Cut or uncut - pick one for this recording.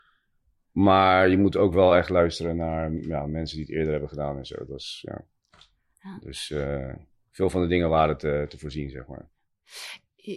uncut